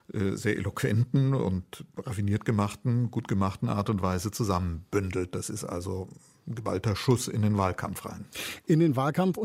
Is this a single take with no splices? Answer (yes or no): yes